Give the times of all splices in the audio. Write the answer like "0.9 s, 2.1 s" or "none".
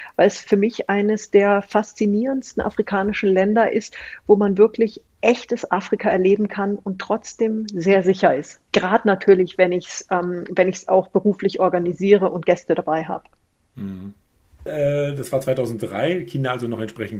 8.7 s, 14.7 s